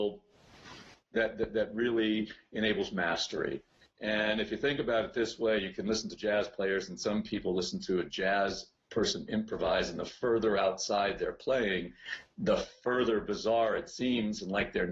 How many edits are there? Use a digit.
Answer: 0